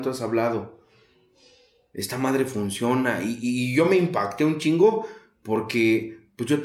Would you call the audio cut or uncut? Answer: uncut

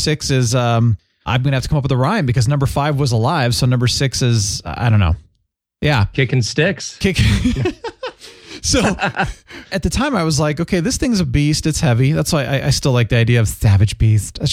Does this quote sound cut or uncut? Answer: uncut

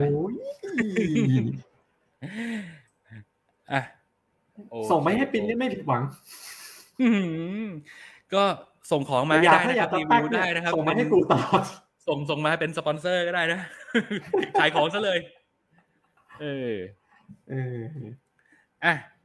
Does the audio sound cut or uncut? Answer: uncut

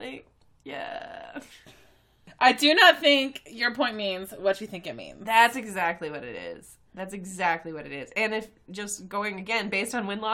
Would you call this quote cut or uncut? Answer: uncut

